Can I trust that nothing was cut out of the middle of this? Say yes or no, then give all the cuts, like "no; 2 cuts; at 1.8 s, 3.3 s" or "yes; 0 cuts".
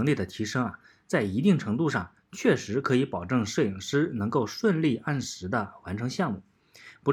yes; 0 cuts